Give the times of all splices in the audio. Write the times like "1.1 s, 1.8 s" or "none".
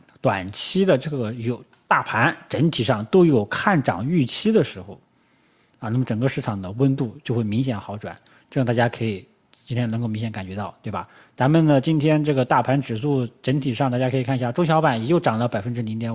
none